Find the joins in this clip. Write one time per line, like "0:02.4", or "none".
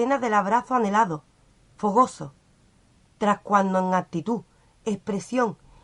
0:03.1